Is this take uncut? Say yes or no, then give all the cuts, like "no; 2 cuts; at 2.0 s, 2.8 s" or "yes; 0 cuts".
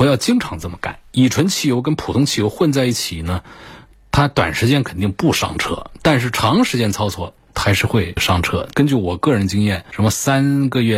no; 1 cut; at 8.7 s